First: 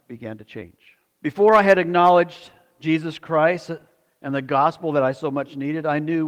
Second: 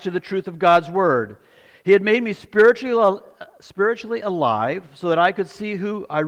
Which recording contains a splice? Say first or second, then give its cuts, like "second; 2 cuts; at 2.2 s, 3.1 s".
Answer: first; 1 cut; at 1.2 s